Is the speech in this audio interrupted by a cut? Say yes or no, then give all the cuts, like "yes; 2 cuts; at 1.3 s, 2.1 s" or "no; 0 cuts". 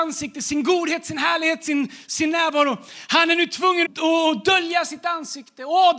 yes; 1 cut; at 3.8 s